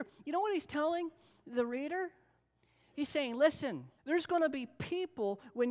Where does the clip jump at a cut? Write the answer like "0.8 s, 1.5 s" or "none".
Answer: 4.0 s